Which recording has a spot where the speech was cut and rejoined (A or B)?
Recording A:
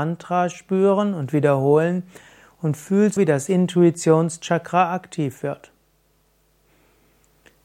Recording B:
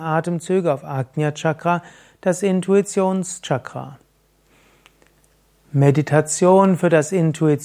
A